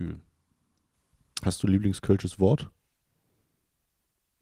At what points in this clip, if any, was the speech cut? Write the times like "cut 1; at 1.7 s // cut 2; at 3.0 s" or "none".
none